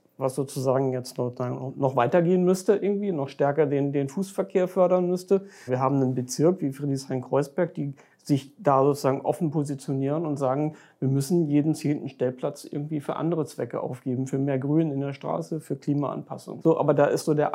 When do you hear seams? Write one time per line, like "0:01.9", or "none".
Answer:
0:05.7
0:16.6

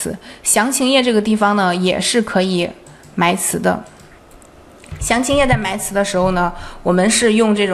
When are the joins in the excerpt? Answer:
none

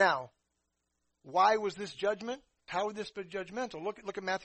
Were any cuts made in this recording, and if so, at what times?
0:02.7

